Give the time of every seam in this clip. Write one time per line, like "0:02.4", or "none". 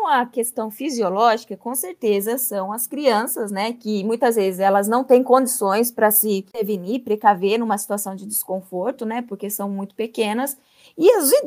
none